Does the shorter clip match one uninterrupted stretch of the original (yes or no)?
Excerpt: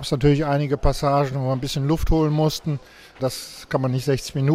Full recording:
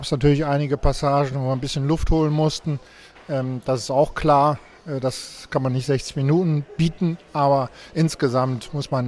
no